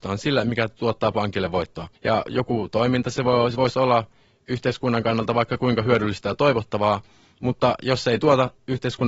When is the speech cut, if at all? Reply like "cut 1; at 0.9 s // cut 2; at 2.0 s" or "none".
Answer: cut 1; at 2.0 s